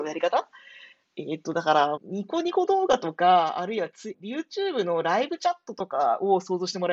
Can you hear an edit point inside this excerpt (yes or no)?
yes